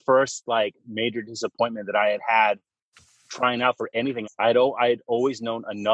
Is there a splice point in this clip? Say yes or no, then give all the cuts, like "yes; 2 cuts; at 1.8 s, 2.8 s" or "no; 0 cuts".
yes; 1 cut; at 4.2 s